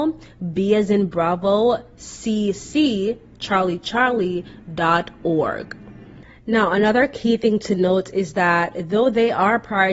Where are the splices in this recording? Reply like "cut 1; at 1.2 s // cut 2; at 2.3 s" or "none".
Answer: none